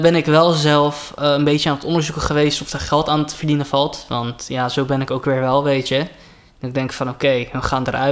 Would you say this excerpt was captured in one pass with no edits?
yes; 0 cuts

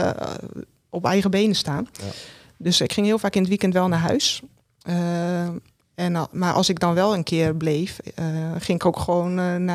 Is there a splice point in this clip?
no; 0 cuts

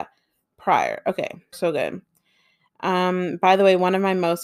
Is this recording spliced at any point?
yes; 1 cut; at 1.5 s

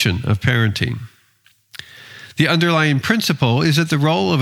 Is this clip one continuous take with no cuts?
yes; 0 cuts

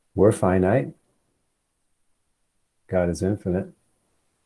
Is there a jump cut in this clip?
no; 0 cuts

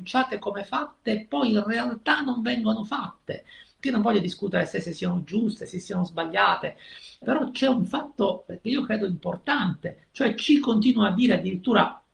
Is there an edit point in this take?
yes; 2 cuts; at 3.8 s, 7.2 s

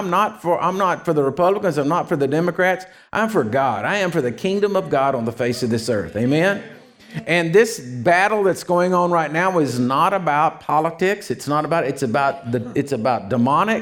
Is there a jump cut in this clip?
no; 0 cuts

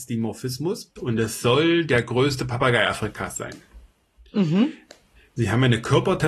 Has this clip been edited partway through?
yes; 1 cut; at 1.0 s

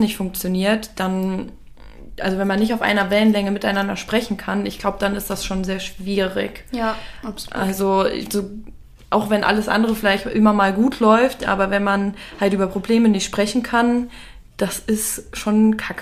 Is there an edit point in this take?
no; 0 cuts

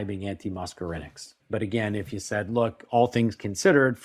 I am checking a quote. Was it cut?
yes; 1 cut; at 1.4 s

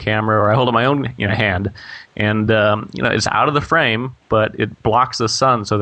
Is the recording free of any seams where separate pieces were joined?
yes; 0 cuts

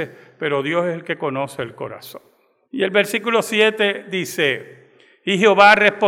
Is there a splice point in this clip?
yes; 1 cut; at 2.6 s

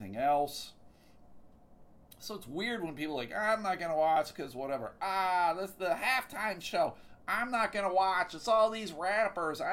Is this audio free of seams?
yes; 0 cuts

